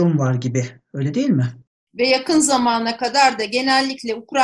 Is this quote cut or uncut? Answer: cut